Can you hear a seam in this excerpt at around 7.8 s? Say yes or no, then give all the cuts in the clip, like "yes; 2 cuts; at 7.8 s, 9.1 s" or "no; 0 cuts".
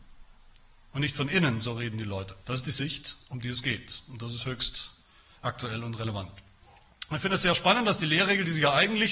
no; 1 cut; at 2.4 s